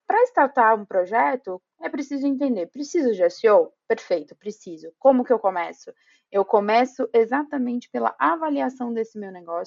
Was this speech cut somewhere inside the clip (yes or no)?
no